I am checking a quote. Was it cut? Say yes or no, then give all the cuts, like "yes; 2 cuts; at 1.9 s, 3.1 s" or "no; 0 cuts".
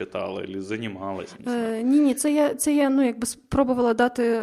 no; 0 cuts